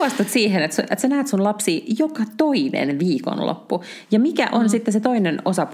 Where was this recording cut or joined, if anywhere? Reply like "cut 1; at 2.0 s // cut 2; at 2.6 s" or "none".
none